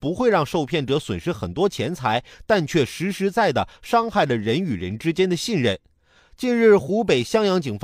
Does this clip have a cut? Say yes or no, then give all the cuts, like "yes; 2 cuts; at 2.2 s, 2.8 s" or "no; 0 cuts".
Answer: yes; 2 cuts; at 3.3 s, 6.2 s